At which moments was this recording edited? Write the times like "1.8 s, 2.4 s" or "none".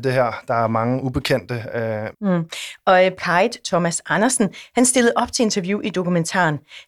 2.1 s, 3.2 s